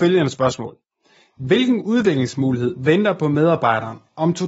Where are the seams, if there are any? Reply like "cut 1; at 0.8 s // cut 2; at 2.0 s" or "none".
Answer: none